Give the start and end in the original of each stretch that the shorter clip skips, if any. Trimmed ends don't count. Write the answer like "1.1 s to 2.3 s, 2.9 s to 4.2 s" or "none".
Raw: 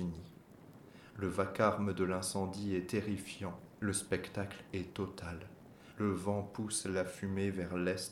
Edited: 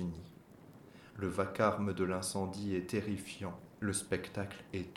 none